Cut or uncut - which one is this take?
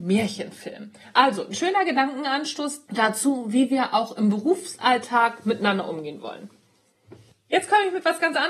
cut